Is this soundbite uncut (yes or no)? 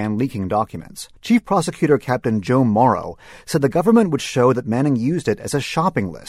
no